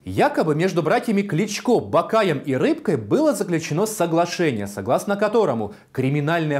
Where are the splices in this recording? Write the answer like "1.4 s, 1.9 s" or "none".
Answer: none